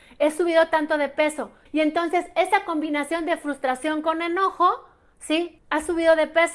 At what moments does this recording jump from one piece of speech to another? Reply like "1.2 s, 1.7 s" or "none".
1.7 s, 5.6 s